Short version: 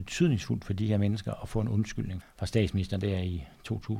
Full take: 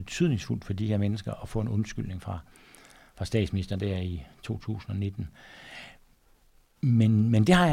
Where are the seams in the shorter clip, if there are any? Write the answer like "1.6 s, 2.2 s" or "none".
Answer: 2.2 s